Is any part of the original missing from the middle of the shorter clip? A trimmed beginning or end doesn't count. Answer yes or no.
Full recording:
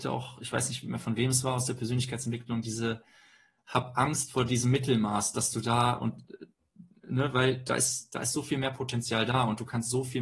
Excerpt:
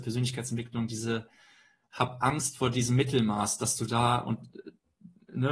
no